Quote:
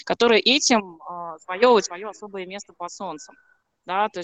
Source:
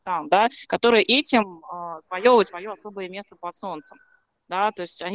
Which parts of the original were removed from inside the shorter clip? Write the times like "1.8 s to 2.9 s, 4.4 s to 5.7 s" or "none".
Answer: none

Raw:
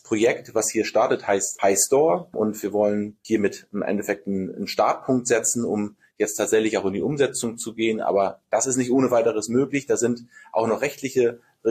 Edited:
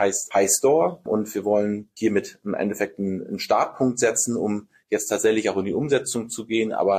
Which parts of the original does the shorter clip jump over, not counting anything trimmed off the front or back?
none

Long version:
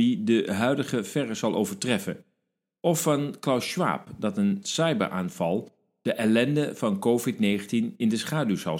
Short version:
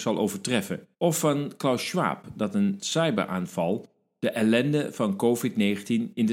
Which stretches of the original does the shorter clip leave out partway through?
2.3 s to 2.8 s

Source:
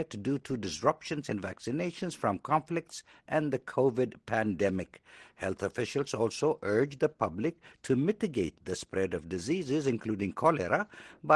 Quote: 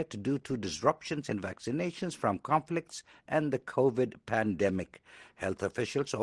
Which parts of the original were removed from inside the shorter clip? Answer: none

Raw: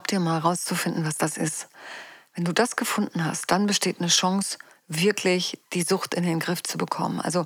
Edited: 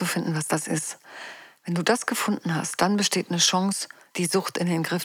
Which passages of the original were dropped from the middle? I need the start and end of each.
4.8 s to 5.7 s

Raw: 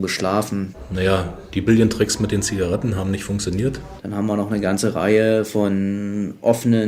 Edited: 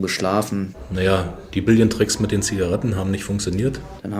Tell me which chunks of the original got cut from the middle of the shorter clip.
none

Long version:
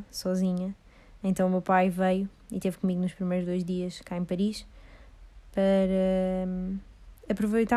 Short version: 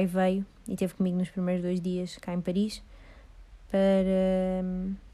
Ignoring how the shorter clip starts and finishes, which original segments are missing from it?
none

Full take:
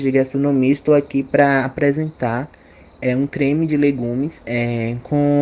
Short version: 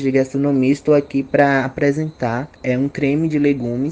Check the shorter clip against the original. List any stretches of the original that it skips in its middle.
2.6 s to 2.9 s

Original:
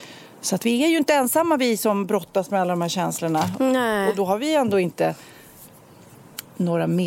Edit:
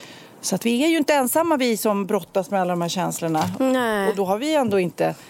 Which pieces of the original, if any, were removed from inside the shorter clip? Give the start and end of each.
none

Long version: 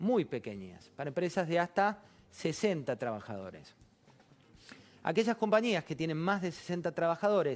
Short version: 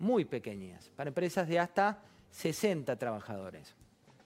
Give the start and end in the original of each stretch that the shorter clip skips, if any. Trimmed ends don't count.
none

